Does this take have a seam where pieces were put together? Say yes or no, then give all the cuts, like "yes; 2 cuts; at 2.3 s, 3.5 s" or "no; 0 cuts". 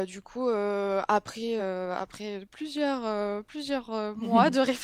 no; 0 cuts